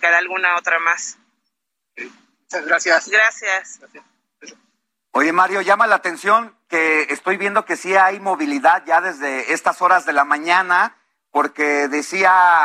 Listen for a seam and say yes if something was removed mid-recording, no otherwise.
yes